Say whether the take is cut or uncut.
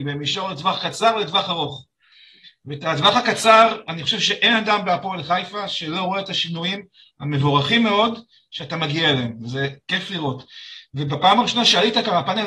uncut